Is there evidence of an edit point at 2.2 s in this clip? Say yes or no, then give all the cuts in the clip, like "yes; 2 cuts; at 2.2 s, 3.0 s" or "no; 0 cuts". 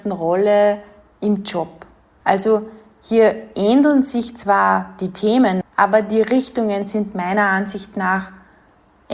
yes; 2 cuts; at 2.2 s, 5.6 s